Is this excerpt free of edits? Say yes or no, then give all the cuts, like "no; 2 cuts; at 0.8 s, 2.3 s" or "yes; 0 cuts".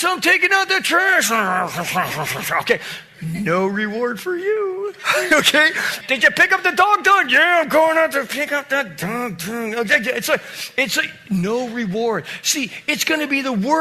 no; 1 cut; at 6.0 s